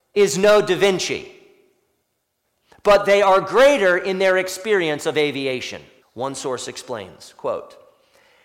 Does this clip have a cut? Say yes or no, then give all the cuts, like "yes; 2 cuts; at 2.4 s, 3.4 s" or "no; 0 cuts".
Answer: yes; 1 cut; at 6.0 s